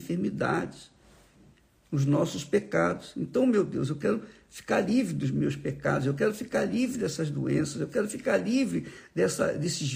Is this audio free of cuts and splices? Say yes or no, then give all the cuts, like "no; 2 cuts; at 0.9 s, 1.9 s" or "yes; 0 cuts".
yes; 0 cuts